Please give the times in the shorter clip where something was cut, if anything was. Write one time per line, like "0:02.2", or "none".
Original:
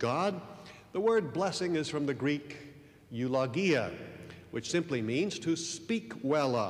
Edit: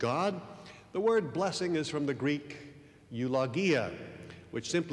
none